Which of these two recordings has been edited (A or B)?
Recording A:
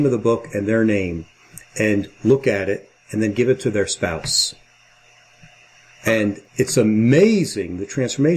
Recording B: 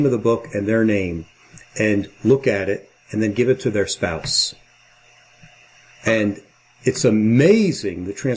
A